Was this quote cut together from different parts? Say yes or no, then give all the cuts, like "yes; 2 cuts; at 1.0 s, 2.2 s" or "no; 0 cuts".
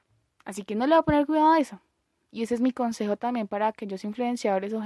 no; 0 cuts